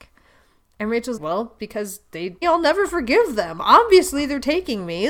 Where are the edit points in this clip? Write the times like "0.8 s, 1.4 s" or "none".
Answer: 1.2 s, 2.4 s